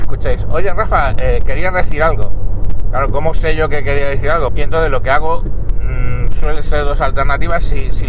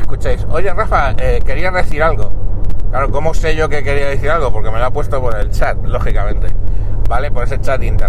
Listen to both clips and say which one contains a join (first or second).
first